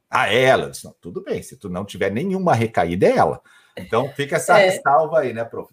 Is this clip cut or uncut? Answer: cut